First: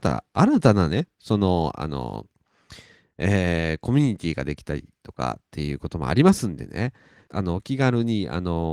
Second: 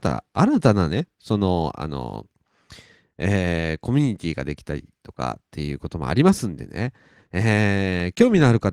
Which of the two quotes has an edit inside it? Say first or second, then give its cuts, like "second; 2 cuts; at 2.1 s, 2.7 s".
first; 1 cut; at 7.3 s